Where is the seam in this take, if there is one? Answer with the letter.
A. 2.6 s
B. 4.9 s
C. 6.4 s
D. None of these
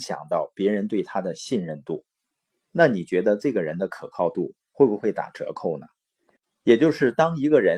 A